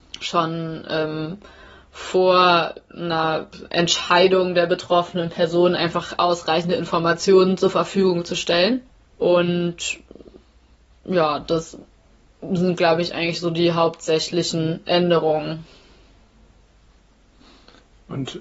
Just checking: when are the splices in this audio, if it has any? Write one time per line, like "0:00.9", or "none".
0:09.2